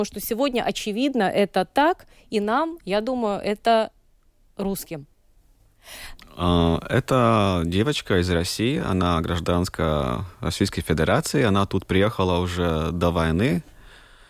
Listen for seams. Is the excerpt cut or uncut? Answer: cut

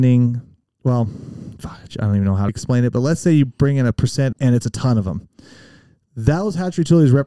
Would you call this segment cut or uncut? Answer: cut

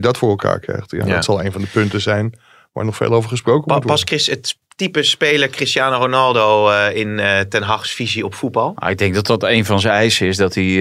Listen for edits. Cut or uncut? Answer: uncut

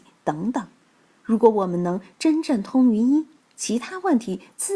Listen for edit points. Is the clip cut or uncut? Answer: uncut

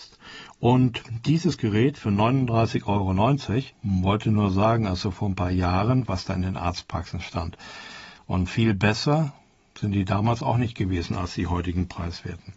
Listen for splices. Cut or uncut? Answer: cut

